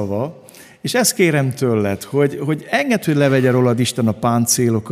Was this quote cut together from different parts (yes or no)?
no